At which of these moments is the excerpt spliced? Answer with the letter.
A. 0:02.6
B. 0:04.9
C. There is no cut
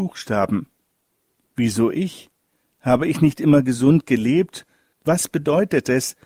B